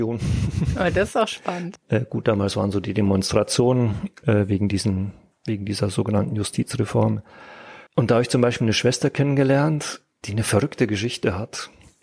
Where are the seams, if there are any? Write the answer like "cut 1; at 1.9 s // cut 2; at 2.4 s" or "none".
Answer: cut 1; at 1.8 s // cut 2; at 7.9 s